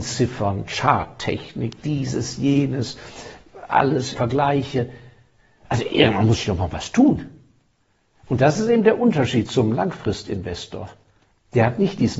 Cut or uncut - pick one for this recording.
cut